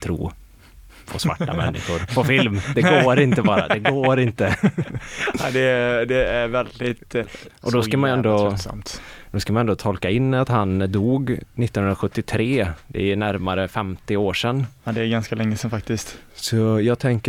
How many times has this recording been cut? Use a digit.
1